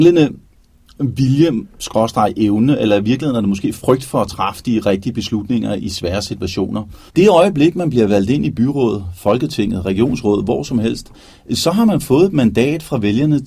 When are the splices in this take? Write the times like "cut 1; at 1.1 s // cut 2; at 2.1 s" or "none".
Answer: cut 1; at 7.1 s